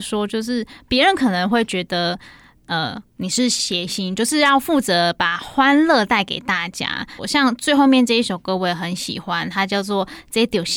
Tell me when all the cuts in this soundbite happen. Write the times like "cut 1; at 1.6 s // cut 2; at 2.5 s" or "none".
cut 1; at 7.2 s